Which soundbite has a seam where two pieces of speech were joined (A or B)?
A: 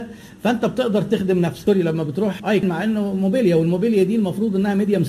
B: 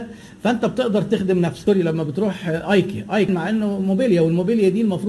A